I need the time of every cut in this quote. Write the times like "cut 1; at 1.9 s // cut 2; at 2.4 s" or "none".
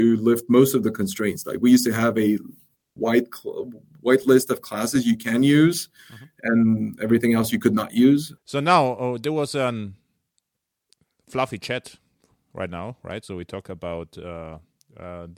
cut 1; at 8.4 s